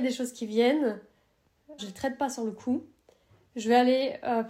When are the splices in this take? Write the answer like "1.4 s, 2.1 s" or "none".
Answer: 1.8 s